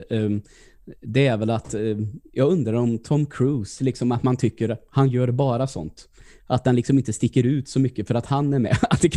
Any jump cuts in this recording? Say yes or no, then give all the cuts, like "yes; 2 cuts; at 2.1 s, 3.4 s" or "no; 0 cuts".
no; 0 cuts